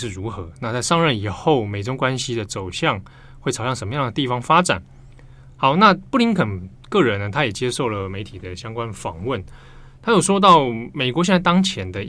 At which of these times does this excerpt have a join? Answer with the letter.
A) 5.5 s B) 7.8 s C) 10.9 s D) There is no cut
D